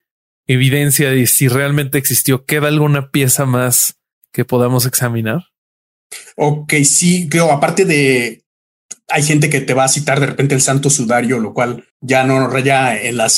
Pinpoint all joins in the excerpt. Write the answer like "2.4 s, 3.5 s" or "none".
11.9 s